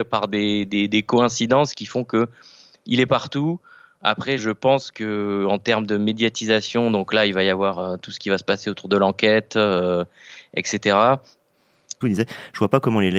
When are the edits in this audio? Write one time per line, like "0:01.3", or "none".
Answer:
0:04.4
0:12.0